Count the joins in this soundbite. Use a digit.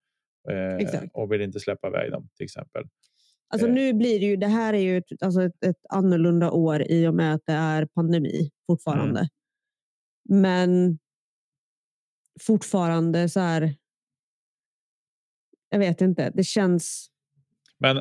0